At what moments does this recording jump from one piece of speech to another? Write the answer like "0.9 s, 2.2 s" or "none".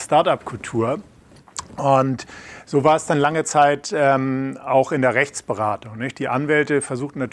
none